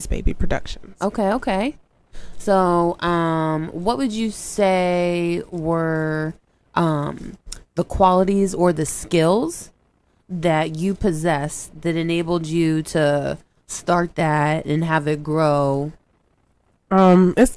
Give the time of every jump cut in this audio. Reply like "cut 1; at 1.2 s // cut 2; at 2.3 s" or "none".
none